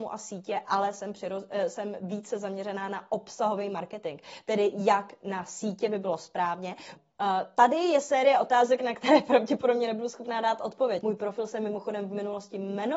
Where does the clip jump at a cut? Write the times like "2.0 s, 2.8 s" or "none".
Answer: 7.0 s, 11.0 s